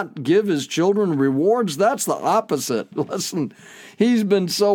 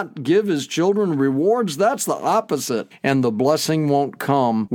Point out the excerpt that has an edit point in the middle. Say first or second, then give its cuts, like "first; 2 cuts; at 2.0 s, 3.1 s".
second; 1 cut; at 2.9 s